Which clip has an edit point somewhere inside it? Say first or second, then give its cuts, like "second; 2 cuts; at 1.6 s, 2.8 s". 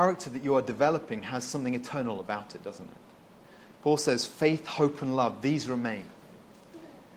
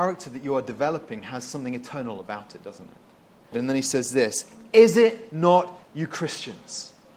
second; 2 cuts; at 3.5 s, 5.9 s